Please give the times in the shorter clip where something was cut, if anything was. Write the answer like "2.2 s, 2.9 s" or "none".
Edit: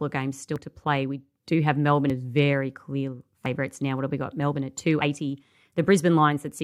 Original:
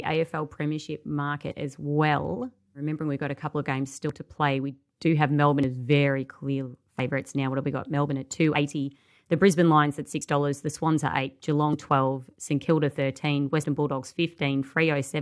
none